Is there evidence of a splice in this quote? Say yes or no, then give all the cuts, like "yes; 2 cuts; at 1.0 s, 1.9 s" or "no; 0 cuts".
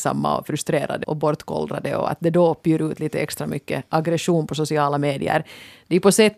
yes; 1 cut; at 1.0 s